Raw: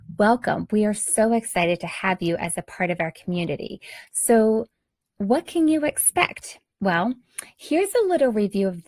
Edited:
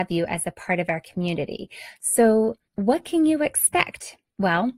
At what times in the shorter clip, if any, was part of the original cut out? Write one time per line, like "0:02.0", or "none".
0:02.7